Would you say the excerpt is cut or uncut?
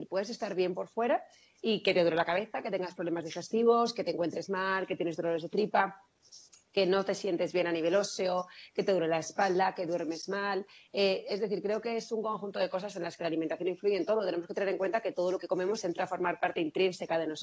uncut